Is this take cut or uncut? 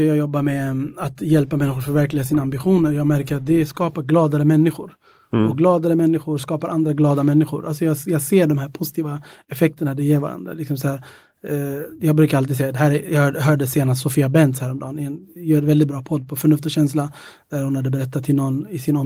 uncut